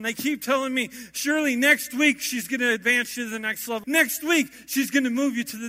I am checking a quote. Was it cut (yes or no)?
yes